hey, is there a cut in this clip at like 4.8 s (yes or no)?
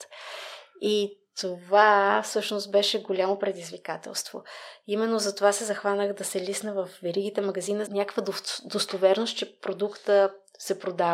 no